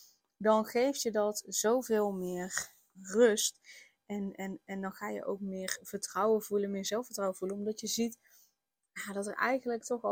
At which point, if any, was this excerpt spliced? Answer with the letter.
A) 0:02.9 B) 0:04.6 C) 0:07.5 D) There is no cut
A